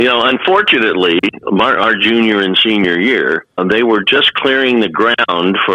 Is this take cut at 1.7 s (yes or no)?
no